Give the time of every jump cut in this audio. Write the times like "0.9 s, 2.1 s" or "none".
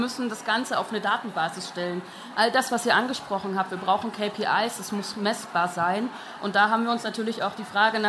none